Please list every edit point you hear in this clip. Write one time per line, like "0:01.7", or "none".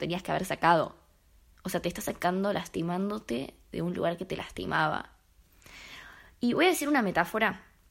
0:01.6